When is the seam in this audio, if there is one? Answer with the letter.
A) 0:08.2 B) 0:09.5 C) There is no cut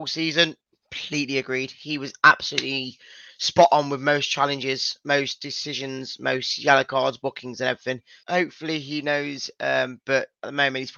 A